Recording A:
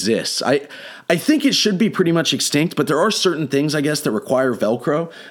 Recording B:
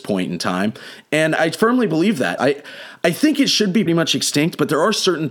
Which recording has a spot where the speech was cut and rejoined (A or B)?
B